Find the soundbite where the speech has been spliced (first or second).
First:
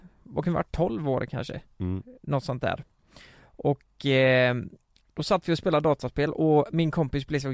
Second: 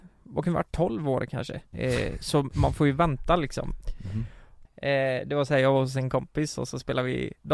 second